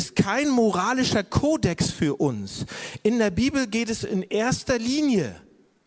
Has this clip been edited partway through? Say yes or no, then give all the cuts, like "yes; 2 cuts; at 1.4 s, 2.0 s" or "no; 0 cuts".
no; 0 cuts